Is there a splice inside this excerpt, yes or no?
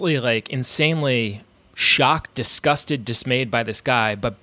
no